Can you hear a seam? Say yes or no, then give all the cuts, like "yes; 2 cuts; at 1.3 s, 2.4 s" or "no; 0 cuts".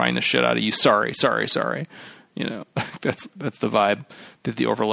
no; 0 cuts